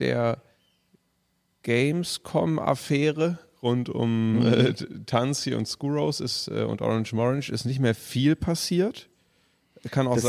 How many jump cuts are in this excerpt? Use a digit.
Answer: 0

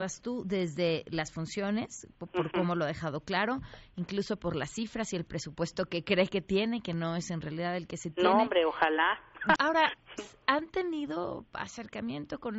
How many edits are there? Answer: 1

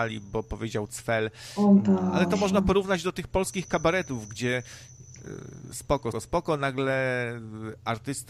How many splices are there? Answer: 1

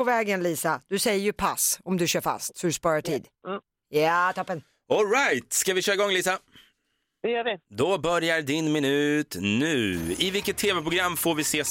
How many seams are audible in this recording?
1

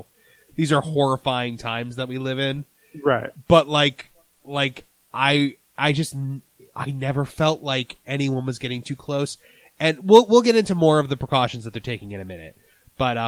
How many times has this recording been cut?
1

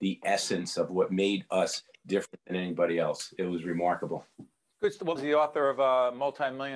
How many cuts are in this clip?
1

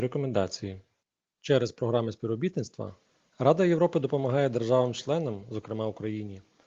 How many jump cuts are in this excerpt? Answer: 0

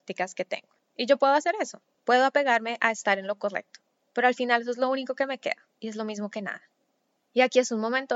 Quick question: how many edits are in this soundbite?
1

